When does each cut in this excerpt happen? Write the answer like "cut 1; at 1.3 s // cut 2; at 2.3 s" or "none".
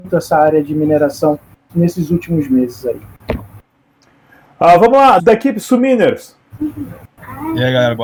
cut 1; at 1.7 s // cut 2; at 5.2 s

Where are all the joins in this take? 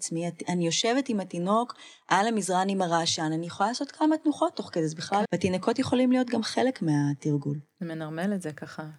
cut 1; at 5.2 s

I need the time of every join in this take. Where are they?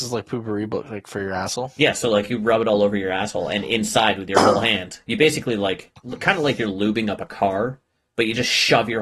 none

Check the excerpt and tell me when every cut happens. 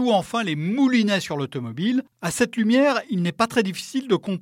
cut 1; at 2.1 s

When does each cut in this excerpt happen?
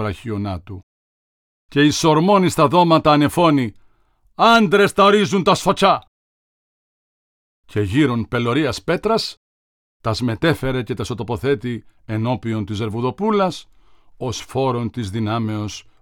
none

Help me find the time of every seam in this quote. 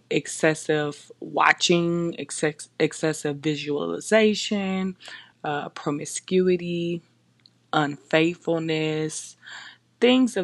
none

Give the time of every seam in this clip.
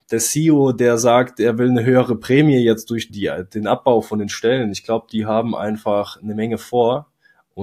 cut 1; at 3.1 s

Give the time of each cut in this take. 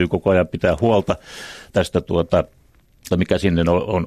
cut 1; at 1.7 s // cut 2; at 3.1 s

